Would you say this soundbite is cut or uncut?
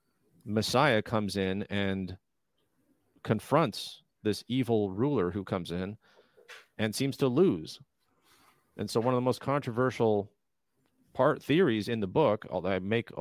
uncut